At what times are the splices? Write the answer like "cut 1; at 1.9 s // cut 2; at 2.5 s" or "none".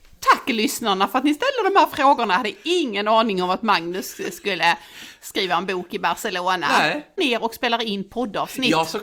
cut 1; at 7.2 s